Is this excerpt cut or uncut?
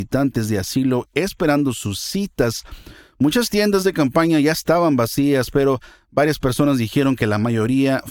uncut